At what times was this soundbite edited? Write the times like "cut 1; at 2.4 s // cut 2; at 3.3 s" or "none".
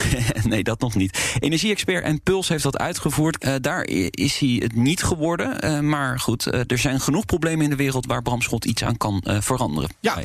cut 1; at 3.4 s